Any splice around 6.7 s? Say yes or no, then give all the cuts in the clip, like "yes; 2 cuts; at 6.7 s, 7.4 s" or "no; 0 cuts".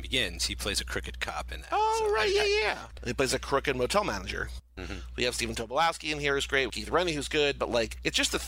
yes; 2 cuts; at 4.8 s, 6.7 s